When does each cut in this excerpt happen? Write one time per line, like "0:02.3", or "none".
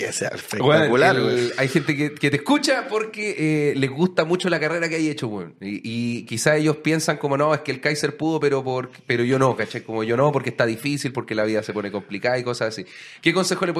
none

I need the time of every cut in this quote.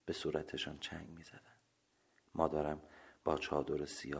none

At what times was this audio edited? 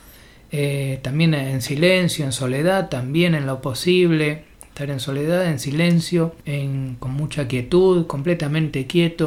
0:06.4

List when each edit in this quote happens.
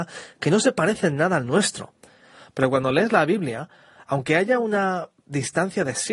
none

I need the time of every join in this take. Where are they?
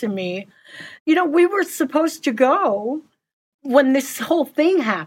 0:01.0

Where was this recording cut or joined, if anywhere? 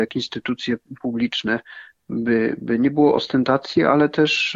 none

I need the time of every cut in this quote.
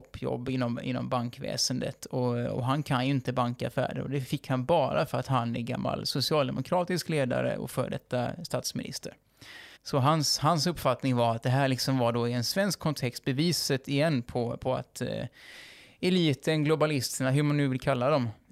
0:09.8

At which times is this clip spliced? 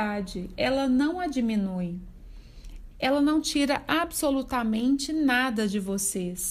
0:02.9

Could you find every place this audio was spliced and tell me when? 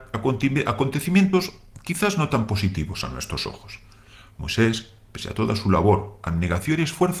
none

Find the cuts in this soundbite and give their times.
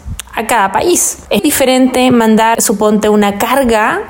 0:01.4

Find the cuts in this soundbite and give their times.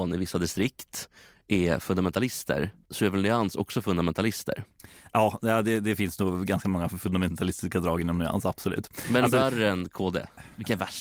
0:02.8

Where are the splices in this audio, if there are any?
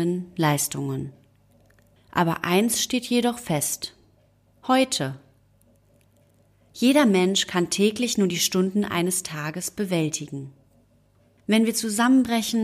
0:02.0
0:04.5

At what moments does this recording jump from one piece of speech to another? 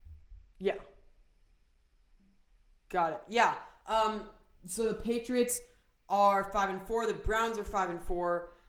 none

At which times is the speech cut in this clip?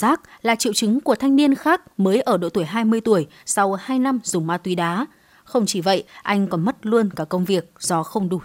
none

